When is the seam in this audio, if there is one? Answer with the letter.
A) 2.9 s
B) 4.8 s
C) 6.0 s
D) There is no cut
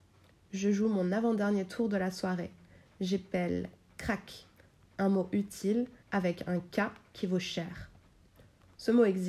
C